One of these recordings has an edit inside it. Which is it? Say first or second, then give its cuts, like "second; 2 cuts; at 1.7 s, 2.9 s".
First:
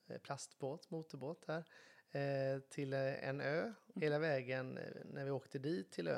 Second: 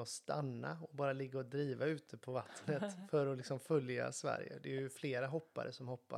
first; 1 cut; at 3.9 s